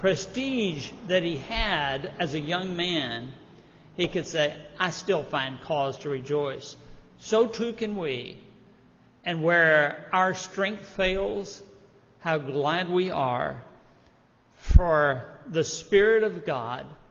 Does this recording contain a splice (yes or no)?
no